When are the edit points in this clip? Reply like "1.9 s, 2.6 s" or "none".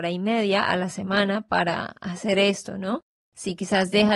none

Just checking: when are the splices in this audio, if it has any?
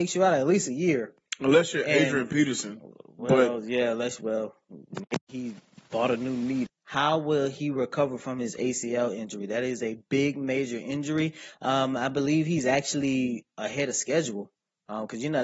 6.7 s

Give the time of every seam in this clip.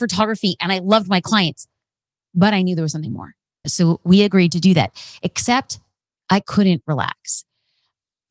3.6 s

